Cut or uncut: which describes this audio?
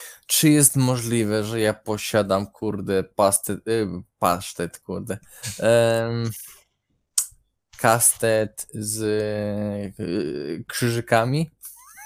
uncut